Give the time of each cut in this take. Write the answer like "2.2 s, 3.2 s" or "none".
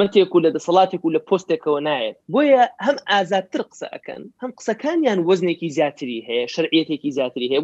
2.2 s, 4.3 s